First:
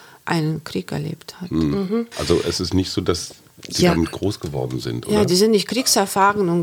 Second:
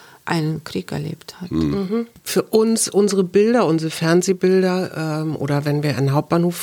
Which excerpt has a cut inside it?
first; 1 cut; at 2.1 s

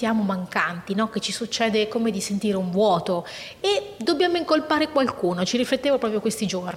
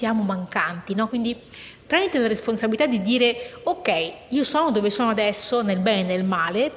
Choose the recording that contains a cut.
second; 1 cut; at 1.1 s

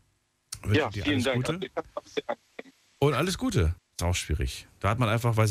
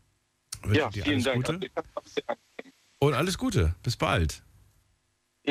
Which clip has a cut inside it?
first; 1 cut; at 3.8 s

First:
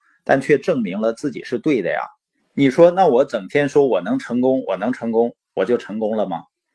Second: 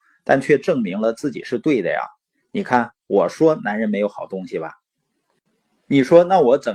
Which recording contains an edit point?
first; 1 cut; at 2.4 s

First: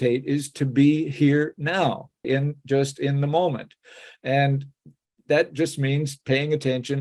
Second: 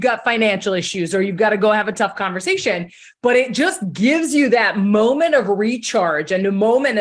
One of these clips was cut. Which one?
first; 1 cut; at 2.2 s

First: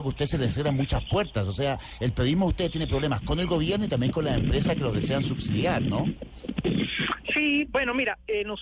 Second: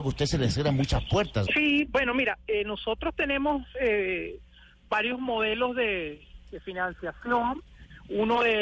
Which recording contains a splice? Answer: second; 1 cut; at 1.5 s

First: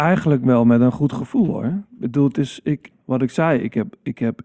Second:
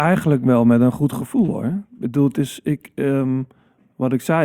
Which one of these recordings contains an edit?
first; 1 cut; at 2.9 s

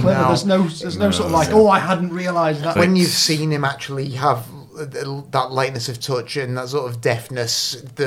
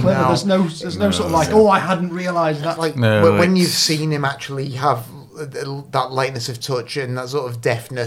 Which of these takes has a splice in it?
first; 1 cut; at 2.8 s

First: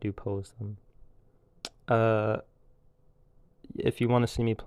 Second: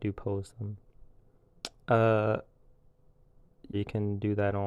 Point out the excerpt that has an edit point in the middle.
second; 1 cut; at 3.7 s

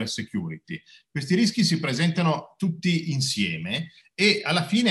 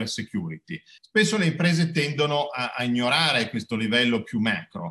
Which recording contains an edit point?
second; 1 cut; at 1.0 s

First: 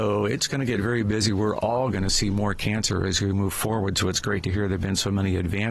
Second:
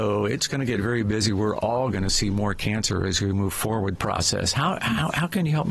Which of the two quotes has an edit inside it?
second; 1 cut; at 3.9 s

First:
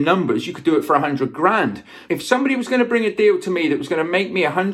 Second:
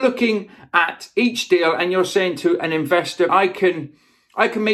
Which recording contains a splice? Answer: second; 1 cut; at 3.3 s

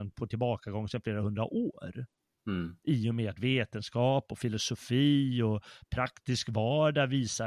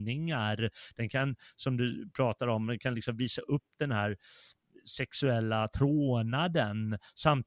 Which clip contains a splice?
first; 1 cut; at 2.8 s

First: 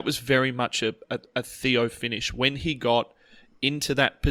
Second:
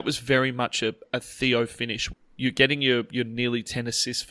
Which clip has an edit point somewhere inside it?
second; 2 cuts; at 1.1 s, 2.1 s

